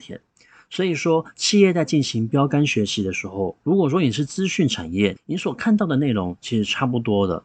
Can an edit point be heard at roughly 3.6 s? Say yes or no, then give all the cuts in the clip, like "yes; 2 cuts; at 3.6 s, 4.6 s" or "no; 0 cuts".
no; 1 cut; at 5.2 s